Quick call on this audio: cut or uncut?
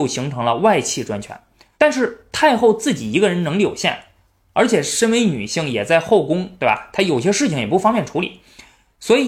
cut